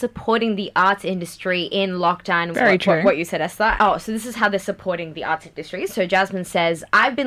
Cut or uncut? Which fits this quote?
cut